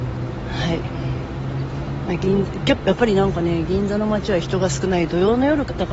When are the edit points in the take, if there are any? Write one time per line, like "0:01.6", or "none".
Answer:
none